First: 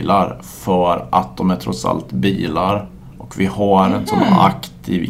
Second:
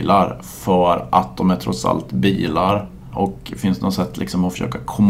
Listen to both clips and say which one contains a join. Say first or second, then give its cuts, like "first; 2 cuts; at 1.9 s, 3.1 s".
second; 1 cut; at 3.1 s